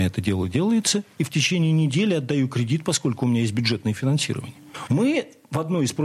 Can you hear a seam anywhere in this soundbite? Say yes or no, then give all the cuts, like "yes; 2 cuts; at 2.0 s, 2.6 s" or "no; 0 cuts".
yes; 1 cut; at 4.9 s